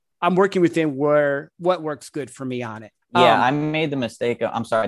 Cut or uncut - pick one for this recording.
cut